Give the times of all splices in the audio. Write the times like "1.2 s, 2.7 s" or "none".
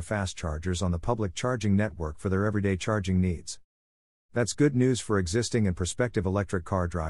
none